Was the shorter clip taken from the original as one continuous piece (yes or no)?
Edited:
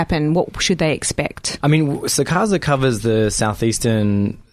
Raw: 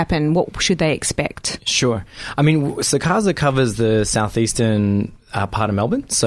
no